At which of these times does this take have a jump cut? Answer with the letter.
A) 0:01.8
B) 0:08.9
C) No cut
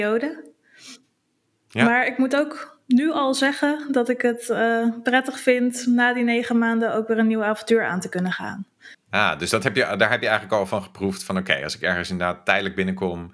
B